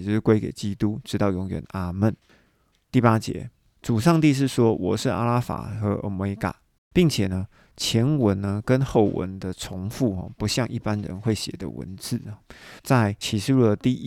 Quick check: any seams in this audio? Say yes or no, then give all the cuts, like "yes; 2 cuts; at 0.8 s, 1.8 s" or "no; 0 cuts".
yes; 3 cuts; at 2.8 s, 6.8 s, 12.8 s